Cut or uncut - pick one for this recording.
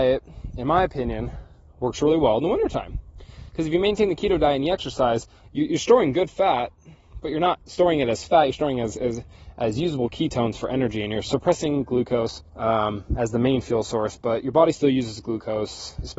cut